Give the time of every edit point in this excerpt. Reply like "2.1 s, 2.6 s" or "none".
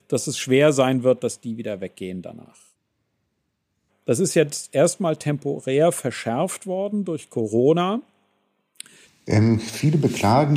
3.9 s, 9.0 s